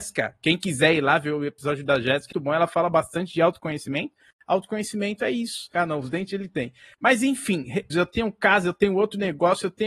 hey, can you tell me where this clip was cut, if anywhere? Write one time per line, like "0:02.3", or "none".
0:02.3
0:05.7
0:07.9